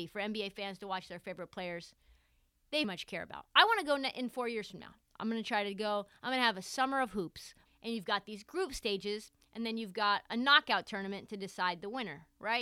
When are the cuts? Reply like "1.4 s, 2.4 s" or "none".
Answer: 2.8 s, 7.7 s